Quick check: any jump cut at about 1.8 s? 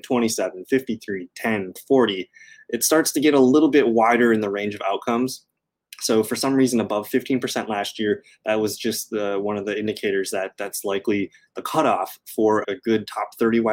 yes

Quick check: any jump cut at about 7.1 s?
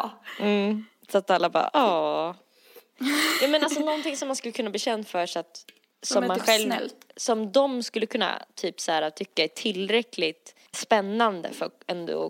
no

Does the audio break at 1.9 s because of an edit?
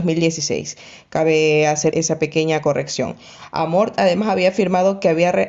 yes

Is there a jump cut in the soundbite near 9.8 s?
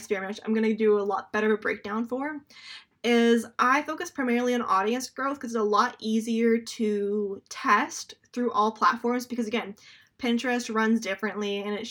no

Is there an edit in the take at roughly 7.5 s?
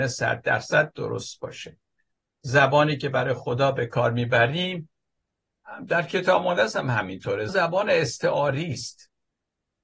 yes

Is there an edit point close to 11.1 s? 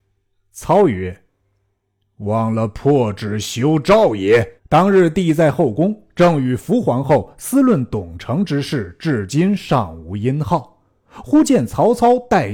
no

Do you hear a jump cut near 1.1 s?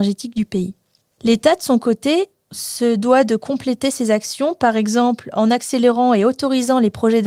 yes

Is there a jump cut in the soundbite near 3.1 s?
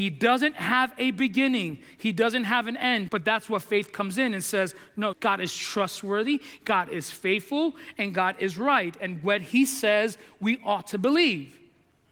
yes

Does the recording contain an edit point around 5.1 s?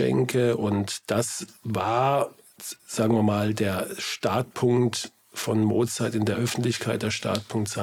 no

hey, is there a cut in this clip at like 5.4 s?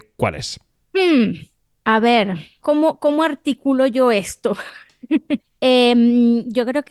yes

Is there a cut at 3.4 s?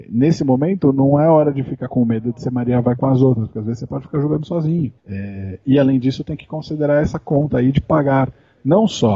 no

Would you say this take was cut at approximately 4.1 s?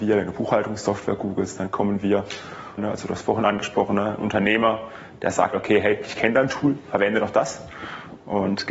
no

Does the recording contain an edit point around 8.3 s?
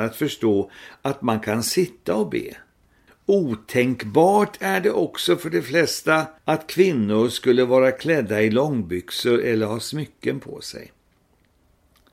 no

